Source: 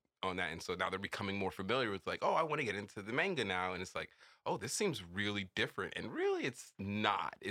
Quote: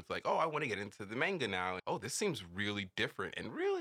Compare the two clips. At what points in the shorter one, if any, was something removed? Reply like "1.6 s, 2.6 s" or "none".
1.8 s